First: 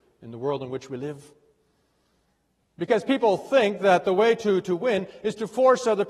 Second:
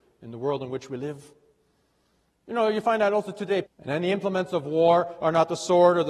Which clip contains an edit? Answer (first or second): second